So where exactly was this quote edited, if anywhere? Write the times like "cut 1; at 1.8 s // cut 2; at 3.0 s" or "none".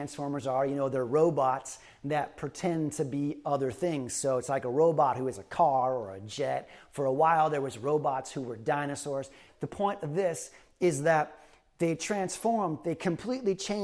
cut 1; at 9.5 s

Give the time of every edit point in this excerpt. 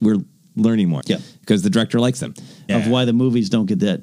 cut 1; at 1.0 s // cut 2; at 2.7 s

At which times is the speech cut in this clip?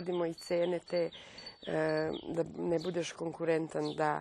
none

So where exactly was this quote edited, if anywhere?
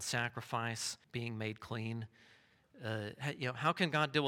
cut 1; at 1.0 s

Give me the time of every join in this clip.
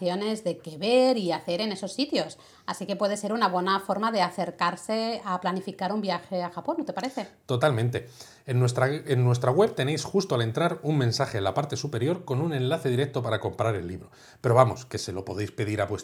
none

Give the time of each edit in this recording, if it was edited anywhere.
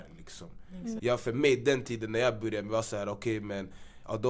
cut 1; at 1.0 s

